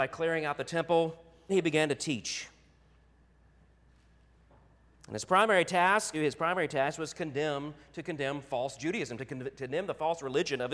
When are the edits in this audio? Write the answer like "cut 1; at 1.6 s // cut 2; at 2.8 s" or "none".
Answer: cut 1; at 1.5 s // cut 2; at 6.1 s